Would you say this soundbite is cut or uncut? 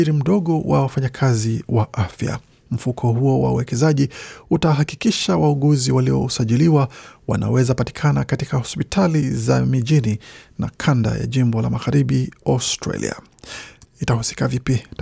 cut